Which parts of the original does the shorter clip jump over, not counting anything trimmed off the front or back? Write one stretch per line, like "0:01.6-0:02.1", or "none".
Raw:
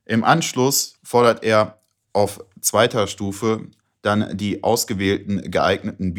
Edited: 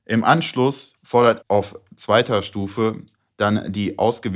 0:01.4-0:02.1